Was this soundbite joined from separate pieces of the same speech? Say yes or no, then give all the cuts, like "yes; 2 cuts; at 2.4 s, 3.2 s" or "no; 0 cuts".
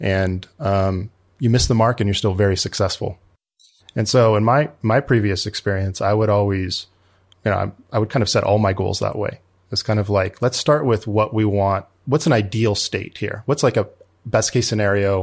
yes; 2 cuts; at 3.8 s, 7.3 s